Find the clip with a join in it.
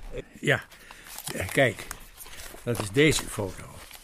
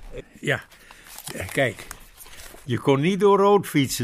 second; 1 cut; at 2.6 s

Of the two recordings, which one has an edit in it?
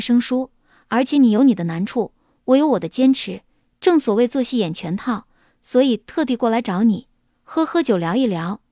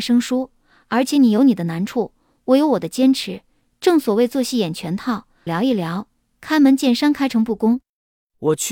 second; 1 cut; at 5.5 s

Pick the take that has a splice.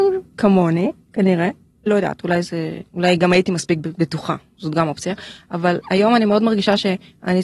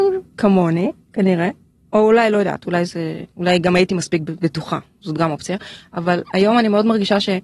first; 1 cut; at 1.9 s

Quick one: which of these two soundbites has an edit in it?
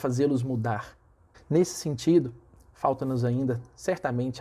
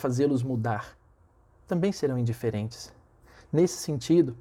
first; 1 cut; at 1.3 s

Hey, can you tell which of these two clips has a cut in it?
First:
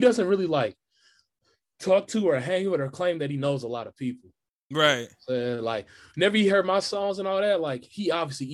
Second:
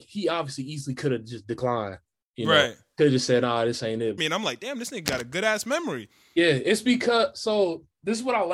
second; 1 cut; at 4.2 s

